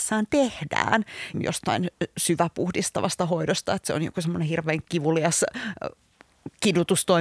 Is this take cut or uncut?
cut